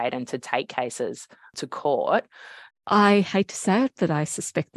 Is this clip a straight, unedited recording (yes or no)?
no